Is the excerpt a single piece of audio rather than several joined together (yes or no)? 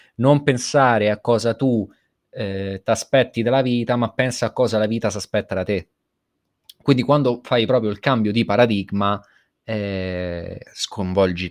yes